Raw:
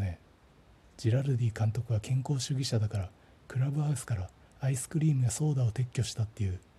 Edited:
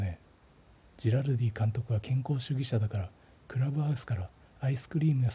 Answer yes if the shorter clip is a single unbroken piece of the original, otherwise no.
yes